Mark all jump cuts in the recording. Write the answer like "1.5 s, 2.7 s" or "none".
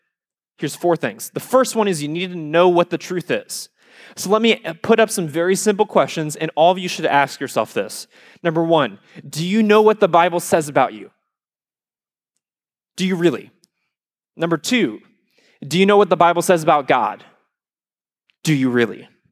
none